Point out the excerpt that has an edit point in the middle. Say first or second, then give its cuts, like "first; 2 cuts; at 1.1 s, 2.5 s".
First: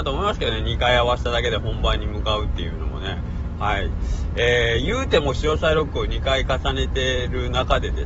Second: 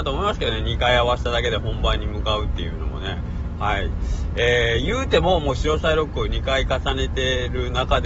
first; 1 cut; at 5.2 s